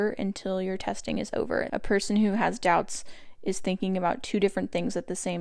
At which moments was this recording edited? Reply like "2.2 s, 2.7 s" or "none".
1.7 s